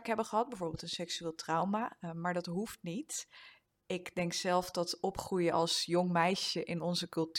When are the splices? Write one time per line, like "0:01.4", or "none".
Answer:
none